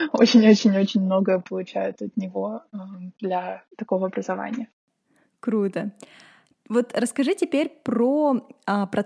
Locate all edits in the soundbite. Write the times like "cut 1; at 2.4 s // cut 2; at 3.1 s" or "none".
cut 1; at 3.7 s